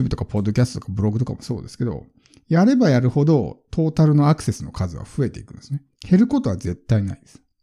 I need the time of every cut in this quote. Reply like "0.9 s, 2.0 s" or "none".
5.9 s